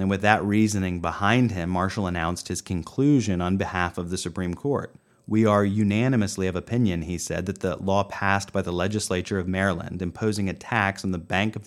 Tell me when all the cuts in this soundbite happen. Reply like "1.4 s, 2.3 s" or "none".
none